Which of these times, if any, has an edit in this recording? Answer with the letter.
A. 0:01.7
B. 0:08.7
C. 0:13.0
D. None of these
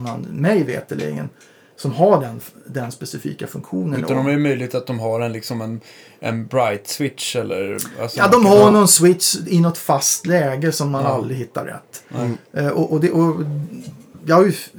D